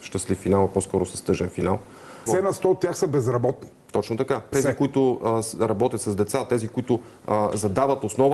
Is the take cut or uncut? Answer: cut